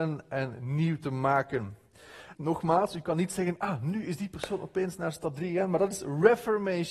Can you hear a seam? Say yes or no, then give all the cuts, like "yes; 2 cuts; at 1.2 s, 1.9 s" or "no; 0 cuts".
yes; 1 cut; at 2.3 s